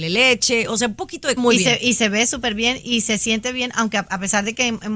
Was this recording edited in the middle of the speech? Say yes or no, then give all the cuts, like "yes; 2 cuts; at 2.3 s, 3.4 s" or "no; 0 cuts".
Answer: yes; 1 cut; at 1.4 s